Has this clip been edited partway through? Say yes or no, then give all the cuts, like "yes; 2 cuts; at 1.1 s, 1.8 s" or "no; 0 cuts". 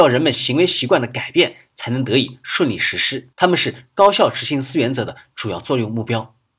yes; 1 cut; at 3.3 s